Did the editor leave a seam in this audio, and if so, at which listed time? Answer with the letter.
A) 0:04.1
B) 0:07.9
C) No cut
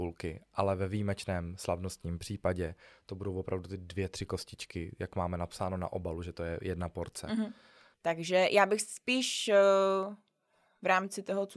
B